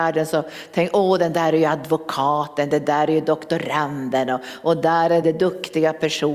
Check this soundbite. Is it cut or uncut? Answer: cut